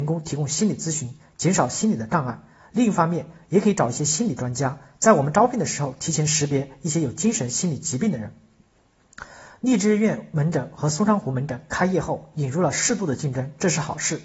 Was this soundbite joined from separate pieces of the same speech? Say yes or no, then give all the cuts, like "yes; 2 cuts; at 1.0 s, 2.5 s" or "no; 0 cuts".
no; 0 cuts